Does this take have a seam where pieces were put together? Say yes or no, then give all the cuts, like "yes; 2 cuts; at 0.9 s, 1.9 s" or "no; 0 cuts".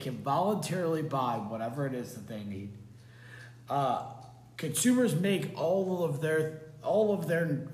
no; 0 cuts